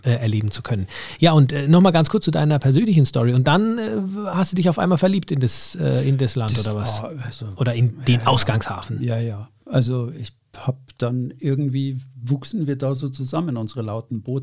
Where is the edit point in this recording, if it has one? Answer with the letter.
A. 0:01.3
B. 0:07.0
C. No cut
C